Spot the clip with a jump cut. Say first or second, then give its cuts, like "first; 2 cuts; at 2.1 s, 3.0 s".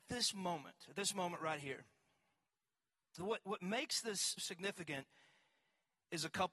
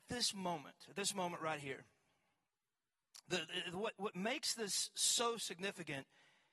first; 2 cuts; at 3.2 s, 4.4 s